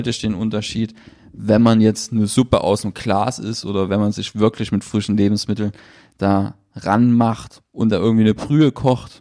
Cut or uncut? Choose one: uncut